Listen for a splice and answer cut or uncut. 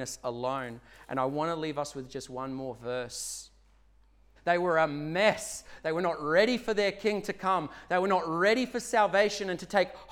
cut